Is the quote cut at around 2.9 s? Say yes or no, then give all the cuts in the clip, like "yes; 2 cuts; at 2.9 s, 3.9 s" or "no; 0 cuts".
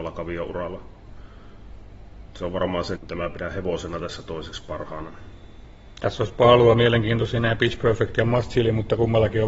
yes; 1 cut; at 2.9 s